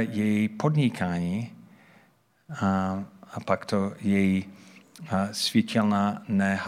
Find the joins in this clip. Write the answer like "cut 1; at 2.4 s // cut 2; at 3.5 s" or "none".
none